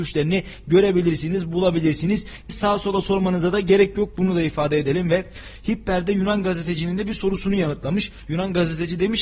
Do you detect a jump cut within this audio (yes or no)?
yes